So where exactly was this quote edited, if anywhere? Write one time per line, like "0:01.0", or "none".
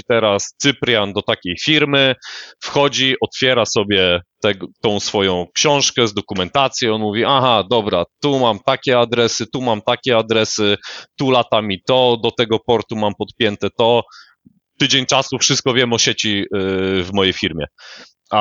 none